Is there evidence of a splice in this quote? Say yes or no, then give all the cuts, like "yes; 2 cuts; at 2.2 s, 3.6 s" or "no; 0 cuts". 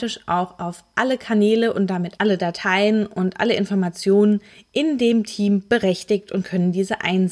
no; 0 cuts